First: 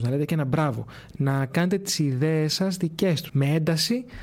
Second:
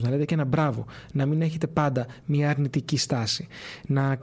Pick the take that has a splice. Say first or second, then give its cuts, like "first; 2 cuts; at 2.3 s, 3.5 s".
first; 2 cuts; at 1.1 s, 3.3 s